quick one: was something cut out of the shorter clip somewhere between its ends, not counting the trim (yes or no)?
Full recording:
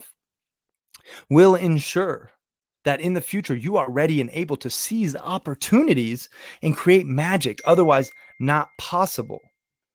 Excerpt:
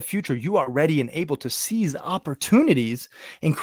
no